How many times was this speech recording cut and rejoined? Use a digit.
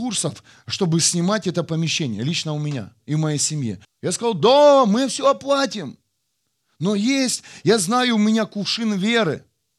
1